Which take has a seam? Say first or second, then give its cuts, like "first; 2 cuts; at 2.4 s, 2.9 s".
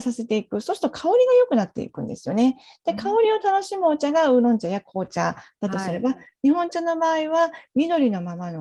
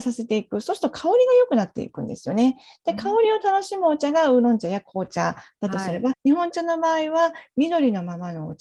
second; 1 cut; at 6.1 s